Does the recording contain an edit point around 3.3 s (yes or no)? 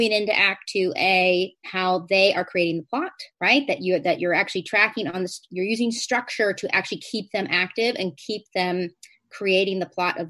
yes